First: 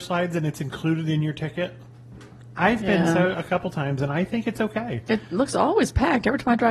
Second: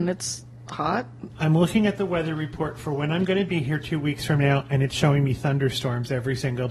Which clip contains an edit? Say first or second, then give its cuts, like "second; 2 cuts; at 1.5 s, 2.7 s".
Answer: second; 1 cut; at 1.3 s